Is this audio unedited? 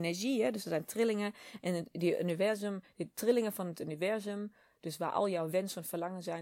yes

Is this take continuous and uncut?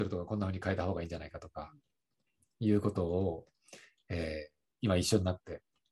yes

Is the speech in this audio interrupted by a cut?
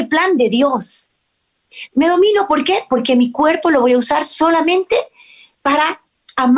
yes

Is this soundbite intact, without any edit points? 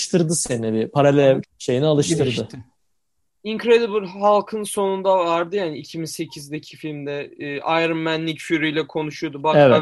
no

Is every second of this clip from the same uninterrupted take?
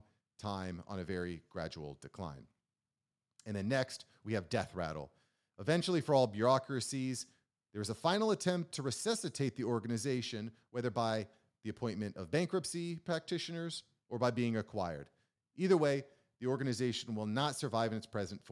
yes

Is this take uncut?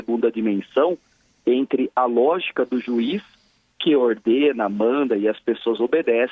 yes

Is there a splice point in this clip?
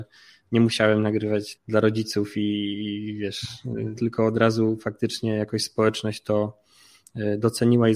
yes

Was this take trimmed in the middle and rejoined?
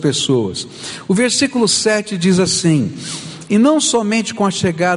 no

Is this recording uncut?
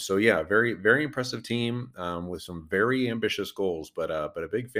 yes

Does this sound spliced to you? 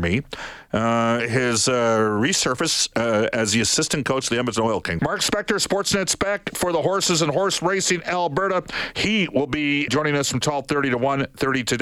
yes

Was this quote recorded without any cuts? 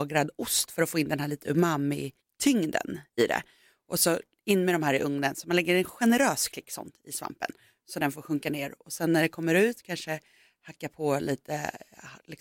yes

